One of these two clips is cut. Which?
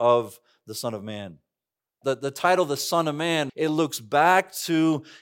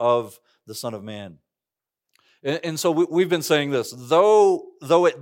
first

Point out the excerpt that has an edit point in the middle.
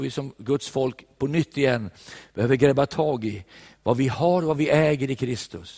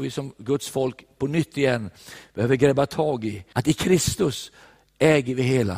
second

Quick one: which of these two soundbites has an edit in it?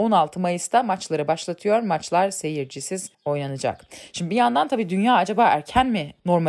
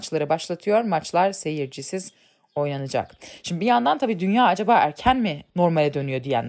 first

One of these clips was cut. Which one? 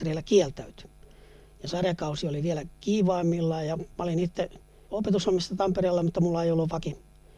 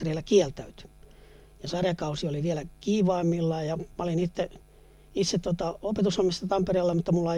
first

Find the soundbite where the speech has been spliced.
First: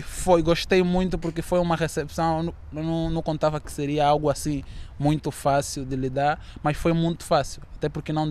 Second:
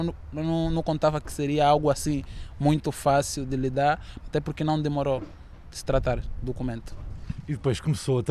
second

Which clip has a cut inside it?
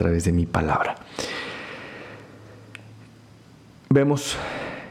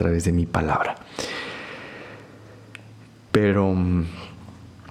second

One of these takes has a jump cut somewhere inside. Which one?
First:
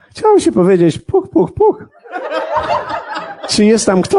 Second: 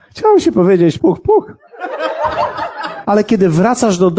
second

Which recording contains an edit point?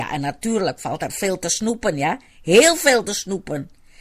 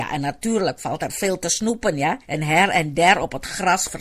second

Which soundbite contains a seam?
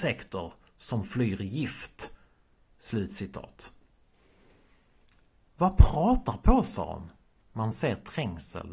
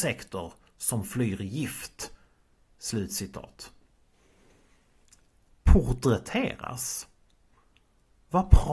first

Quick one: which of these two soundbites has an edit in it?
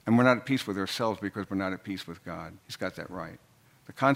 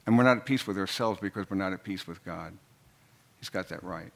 first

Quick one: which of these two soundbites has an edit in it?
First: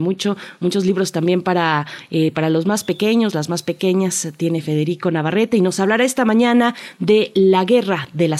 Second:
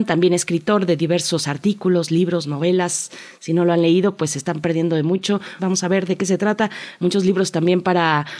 second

